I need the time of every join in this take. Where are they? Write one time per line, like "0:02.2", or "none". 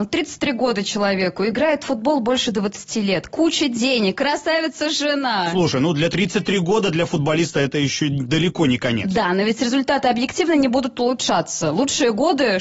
0:06.1